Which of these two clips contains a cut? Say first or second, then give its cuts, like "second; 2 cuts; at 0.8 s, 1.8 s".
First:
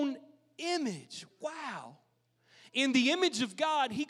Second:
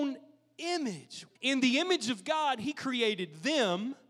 second; 1 cut; at 1.4 s